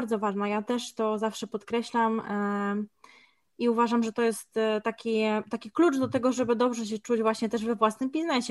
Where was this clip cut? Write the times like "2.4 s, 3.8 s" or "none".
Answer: none